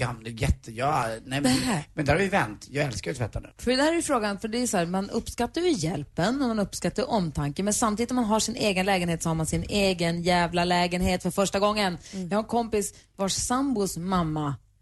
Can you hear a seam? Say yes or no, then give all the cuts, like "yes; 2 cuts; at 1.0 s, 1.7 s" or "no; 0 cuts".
no; 0 cuts